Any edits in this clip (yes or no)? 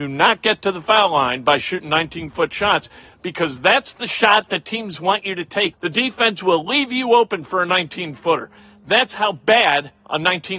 yes